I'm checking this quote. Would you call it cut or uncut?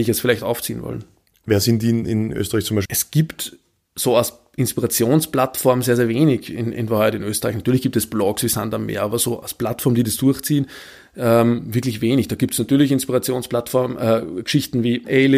cut